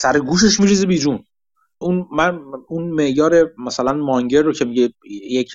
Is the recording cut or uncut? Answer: cut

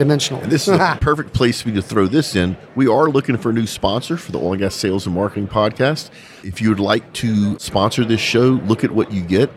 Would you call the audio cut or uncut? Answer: uncut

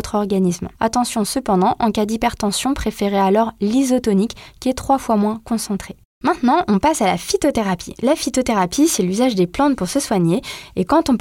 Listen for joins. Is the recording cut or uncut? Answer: uncut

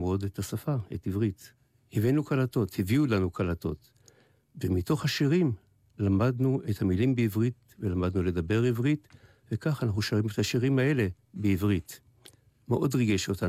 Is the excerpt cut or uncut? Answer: uncut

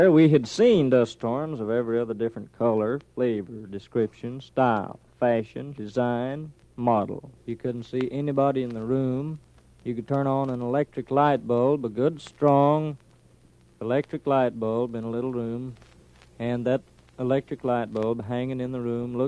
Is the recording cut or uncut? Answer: cut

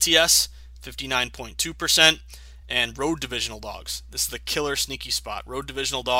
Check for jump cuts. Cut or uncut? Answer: uncut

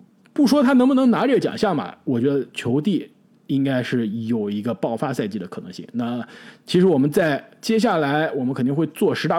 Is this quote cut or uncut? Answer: uncut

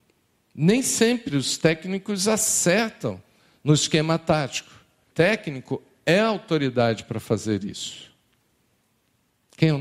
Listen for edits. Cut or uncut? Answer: cut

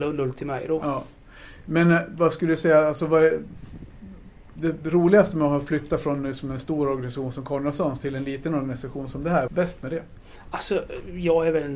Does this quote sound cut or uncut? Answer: cut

